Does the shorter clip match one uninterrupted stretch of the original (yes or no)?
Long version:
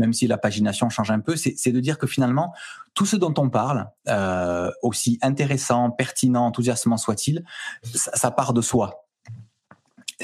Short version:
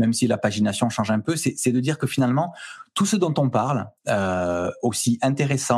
yes